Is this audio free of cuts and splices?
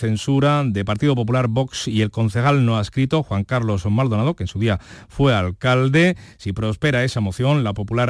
yes; 0 cuts

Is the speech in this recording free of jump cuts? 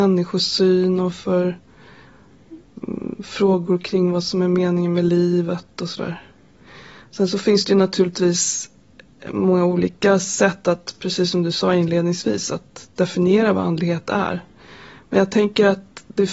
yes; 0 cuts

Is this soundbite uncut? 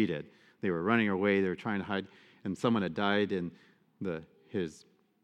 yes; 0 cuts

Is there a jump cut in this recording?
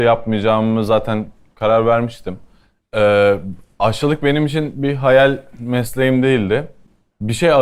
yes; 1 cut; at 2.8 s

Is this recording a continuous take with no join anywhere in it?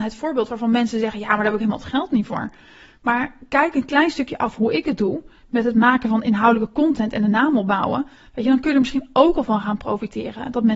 yes; 0 cuts

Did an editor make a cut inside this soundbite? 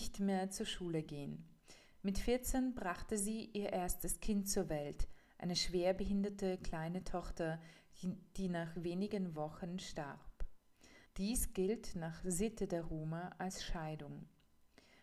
yes; 1 cut; at 11.1 s

